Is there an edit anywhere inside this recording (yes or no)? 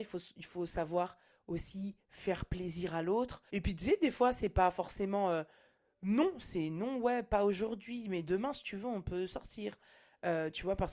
yes